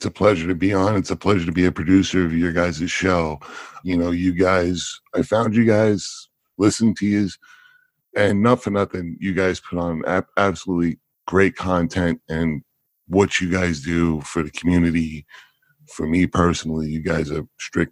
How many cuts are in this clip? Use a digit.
1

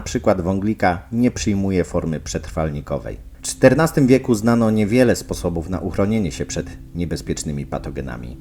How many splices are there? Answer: 1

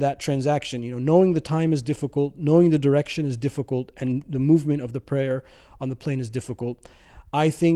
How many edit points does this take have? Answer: 0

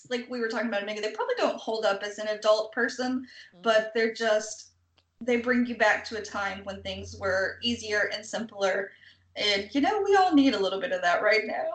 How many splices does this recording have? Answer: 0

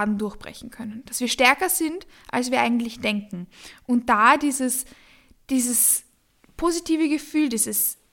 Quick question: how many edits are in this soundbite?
0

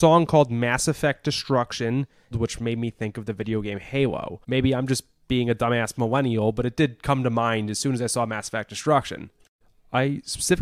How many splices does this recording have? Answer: 2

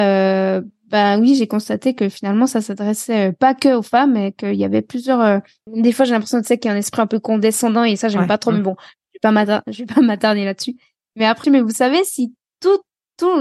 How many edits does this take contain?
2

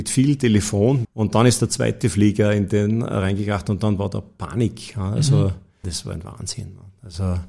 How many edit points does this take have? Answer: 2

